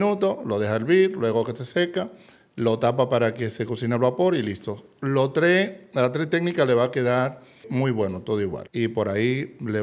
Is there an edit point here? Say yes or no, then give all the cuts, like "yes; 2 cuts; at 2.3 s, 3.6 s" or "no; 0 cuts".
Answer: yes; 1 cut; at 8.7 s